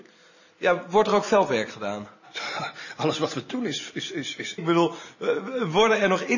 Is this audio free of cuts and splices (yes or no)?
no